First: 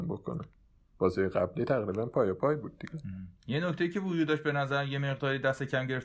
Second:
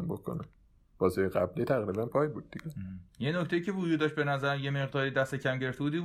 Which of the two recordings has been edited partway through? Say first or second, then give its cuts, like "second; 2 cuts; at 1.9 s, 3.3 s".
second; 1 cut; at 2.1 s